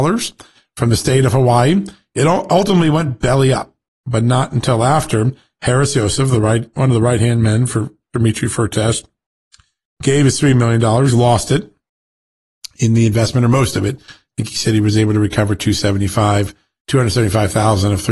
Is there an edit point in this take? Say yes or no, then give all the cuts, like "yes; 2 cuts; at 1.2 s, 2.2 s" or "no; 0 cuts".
no; 0 cuts